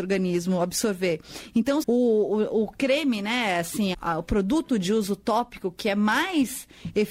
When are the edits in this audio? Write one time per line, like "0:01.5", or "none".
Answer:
0:01.8
0:03.9